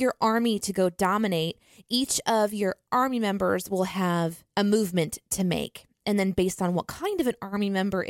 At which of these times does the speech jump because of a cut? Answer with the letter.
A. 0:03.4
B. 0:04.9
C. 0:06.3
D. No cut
D